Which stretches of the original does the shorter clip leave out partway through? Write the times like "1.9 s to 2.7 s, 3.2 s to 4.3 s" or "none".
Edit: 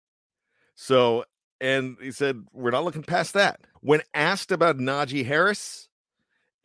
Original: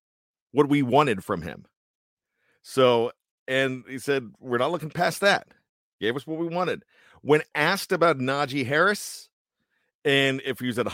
5.6 s to 7.1 s